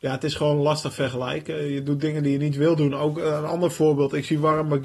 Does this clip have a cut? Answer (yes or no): no